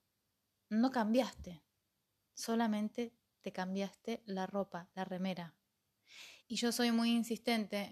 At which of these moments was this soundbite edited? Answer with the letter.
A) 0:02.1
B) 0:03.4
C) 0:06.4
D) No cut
C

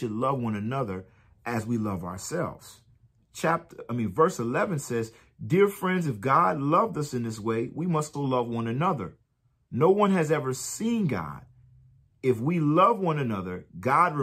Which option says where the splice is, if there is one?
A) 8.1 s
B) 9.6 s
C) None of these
A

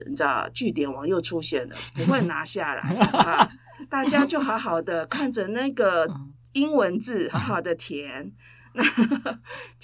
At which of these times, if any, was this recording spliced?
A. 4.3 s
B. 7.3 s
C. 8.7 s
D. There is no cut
B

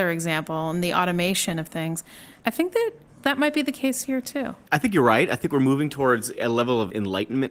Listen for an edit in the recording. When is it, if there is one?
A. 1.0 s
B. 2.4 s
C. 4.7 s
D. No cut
B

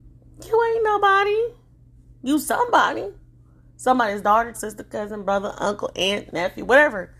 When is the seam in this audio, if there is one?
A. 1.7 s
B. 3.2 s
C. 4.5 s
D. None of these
C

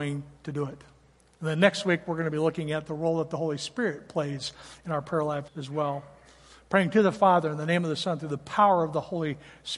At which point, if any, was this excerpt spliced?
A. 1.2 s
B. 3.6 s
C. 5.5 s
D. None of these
C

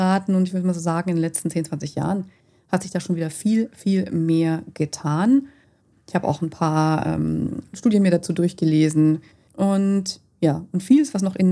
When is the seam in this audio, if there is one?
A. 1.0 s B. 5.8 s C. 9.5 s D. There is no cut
C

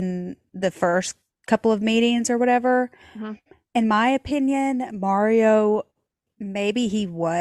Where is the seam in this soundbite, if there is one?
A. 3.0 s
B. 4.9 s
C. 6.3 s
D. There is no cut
C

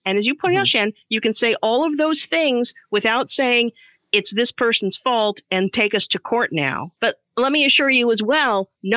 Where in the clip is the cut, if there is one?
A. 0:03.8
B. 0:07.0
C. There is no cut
B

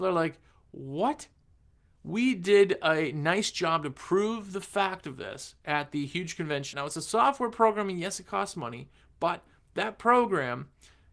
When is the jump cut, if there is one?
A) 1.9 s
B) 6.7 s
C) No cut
B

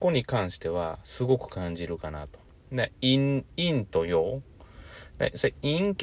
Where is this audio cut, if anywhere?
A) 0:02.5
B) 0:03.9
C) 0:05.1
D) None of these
D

